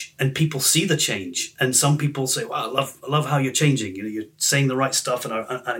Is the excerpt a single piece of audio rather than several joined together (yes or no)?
yes